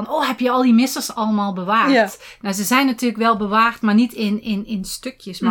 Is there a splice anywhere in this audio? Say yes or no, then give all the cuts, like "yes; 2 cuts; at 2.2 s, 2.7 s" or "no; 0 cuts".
no; 0 cuts